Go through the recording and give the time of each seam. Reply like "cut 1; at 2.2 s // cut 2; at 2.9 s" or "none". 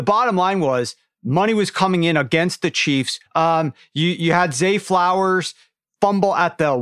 cut 1; at 3.3 s